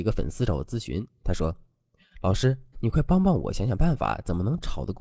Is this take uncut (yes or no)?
no